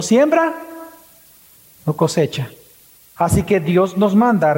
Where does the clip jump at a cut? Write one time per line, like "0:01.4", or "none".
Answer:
0:03.2